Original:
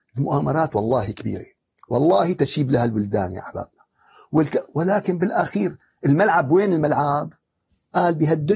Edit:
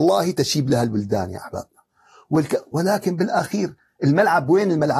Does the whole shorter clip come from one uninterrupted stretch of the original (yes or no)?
yes